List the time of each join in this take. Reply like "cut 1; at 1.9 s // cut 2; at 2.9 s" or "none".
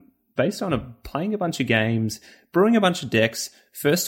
none